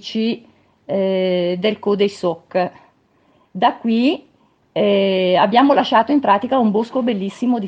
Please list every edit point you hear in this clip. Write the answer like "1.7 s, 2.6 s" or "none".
none